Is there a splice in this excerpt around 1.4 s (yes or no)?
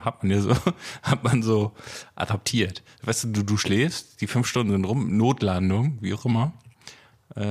no